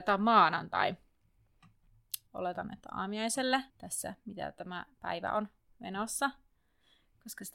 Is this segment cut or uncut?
cut